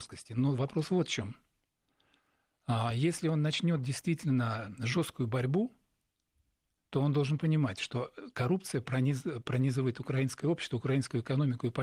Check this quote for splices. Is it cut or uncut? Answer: uncut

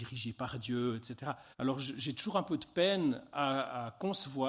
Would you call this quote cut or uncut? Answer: cut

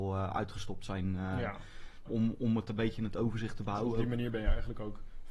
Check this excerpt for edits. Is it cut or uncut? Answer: cut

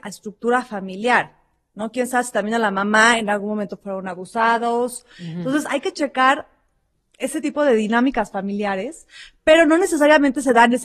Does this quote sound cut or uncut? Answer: uncut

